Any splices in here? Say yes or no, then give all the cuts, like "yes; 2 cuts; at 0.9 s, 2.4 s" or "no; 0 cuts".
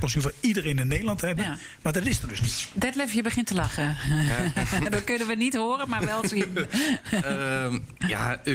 no; 0 cuts